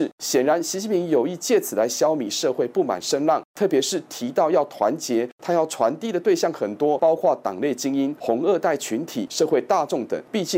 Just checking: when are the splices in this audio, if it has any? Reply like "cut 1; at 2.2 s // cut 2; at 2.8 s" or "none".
none